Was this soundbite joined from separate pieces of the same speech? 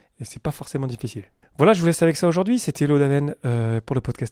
yes; 1 cut; at 1.4 s

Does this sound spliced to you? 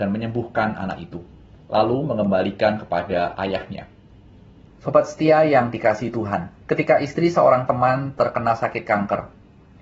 yes; 2 cuts; at 4.7 s, 6.6 s

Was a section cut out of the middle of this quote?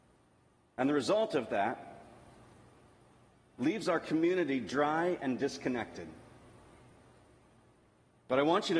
no; 0 cuts

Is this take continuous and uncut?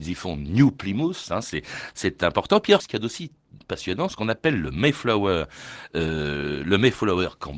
no; 2 cuts; at 2.8 s, 4.1 s

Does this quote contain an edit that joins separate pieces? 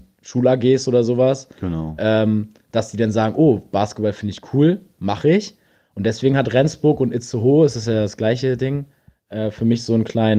no; 0 cuts

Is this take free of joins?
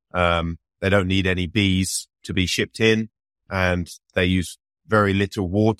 yes; 0 cuts

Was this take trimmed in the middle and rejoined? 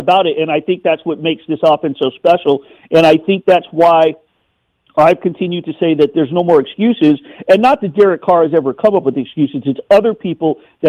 no; 0 cuts

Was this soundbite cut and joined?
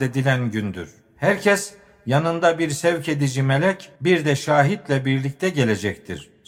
yes; 1 cut; at 4.0 s

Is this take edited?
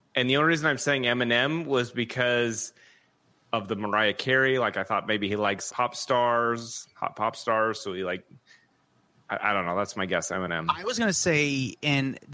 yes; 1 cut; at 5.7 s

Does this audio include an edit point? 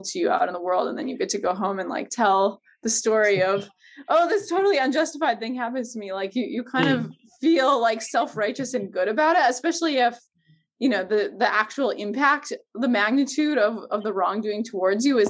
no; 0 cuts

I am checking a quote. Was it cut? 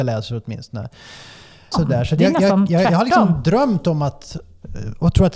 yes; 1 cut; at 1.7 s

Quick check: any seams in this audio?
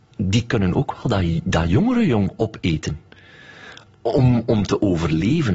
no; 0 cuts

